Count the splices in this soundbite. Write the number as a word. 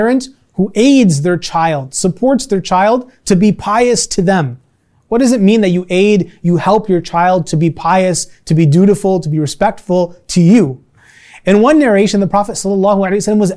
zero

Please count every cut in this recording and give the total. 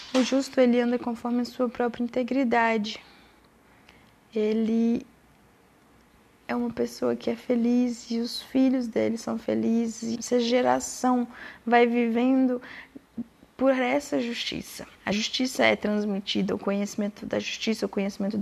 two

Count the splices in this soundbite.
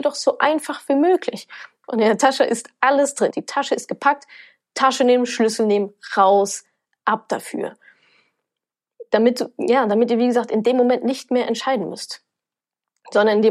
two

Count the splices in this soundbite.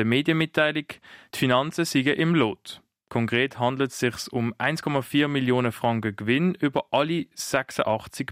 zero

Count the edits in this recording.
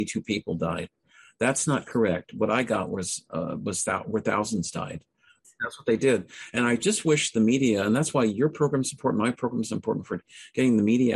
one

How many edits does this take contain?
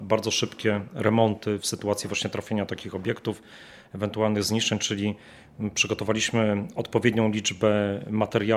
zero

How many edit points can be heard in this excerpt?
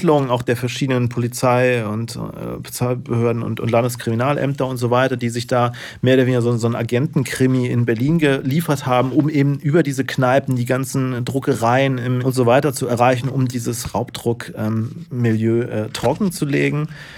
one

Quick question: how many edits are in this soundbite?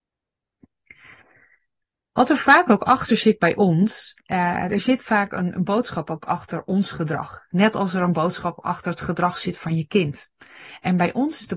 zero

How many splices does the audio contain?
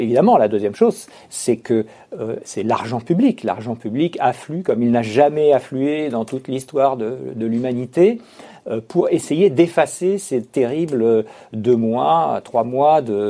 zero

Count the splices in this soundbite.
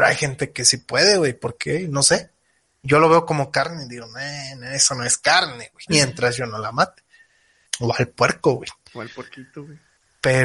one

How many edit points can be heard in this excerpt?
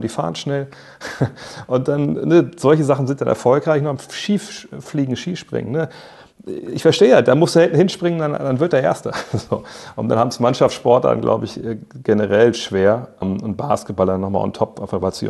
zero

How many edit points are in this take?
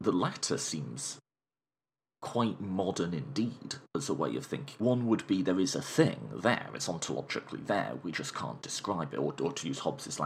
one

